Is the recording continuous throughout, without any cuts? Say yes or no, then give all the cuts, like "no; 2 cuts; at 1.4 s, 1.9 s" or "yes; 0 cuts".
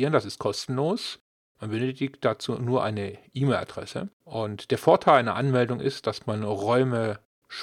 yes; 0 cuts